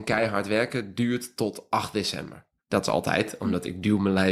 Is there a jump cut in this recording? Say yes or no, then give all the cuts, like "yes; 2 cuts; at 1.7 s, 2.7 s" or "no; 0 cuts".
yes; 1 cut; at 2.6 s